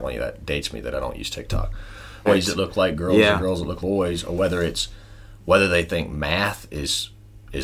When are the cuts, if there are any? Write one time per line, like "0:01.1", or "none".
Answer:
0:02.3
0:03.8